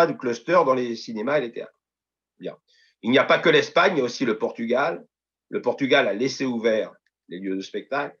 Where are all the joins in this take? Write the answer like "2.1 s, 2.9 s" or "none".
none